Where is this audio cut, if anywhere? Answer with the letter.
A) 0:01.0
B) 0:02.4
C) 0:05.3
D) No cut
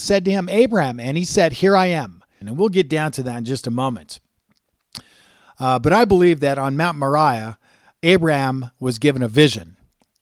B